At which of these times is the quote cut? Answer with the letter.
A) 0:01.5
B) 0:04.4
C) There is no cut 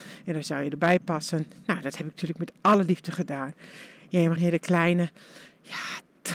B